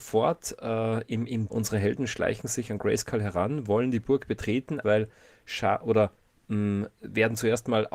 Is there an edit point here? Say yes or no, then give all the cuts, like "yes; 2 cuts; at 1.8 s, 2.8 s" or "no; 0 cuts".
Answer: yes; 2 cuts; at 1.5 s, 4.8 s